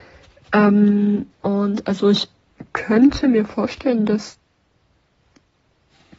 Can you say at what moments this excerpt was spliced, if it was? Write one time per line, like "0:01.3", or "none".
0:01.3